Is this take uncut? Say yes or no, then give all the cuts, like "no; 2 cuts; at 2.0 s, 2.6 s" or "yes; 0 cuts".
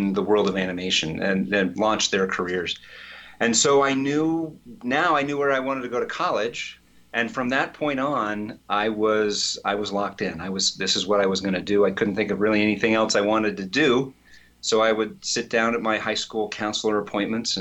yes; 0 cuts